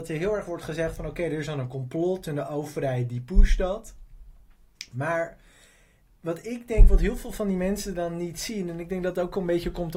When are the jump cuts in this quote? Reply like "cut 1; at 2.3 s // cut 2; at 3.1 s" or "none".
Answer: none